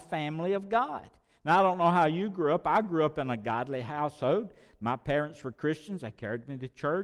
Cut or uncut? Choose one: uncut